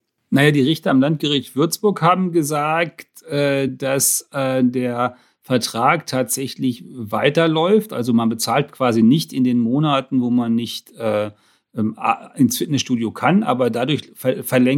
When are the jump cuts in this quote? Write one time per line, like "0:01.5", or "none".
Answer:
none

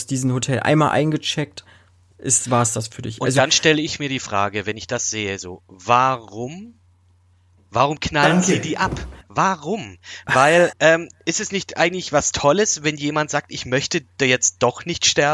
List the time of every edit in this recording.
0:10.7

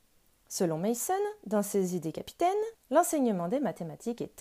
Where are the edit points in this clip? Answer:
0:02.7

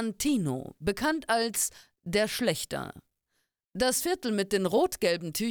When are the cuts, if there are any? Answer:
none

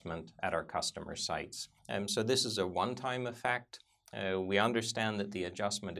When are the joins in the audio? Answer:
0:01.8

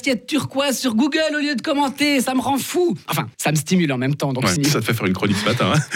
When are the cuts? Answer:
0:03.3
0:04.6

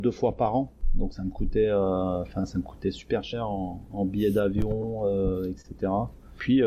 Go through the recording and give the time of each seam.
none

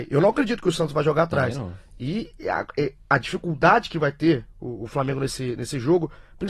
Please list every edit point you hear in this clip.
none

